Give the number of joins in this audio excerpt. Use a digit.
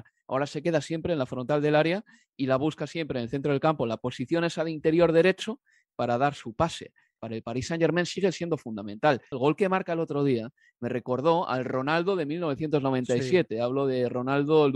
2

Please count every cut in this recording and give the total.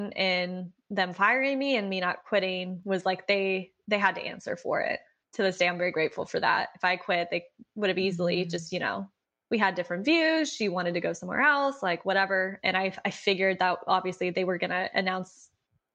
1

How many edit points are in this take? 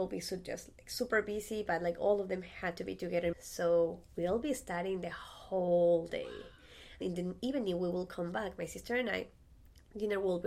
2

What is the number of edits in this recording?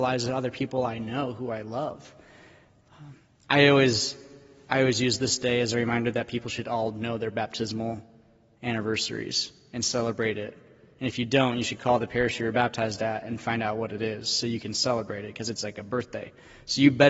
0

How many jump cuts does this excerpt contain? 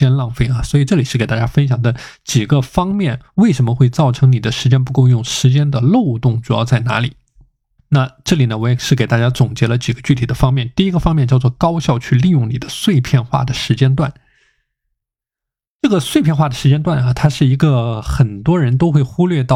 1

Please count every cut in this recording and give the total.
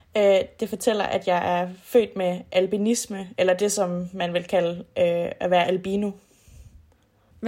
0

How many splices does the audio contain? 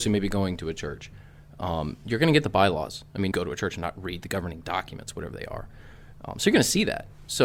1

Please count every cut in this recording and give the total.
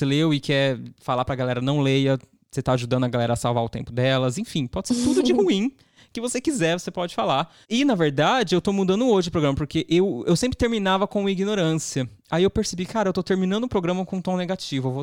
1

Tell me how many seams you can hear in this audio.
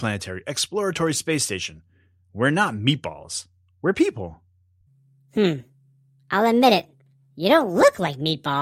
0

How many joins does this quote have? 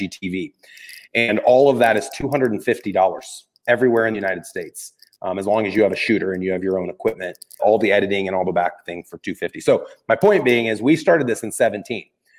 1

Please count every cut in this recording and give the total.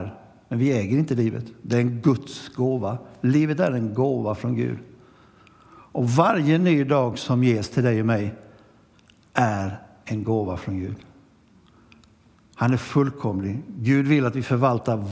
0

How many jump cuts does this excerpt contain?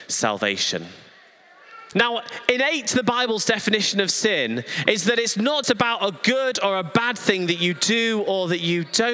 2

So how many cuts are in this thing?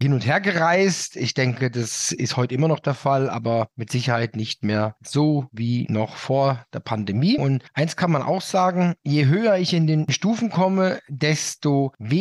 1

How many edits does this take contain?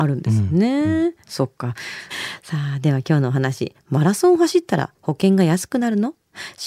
1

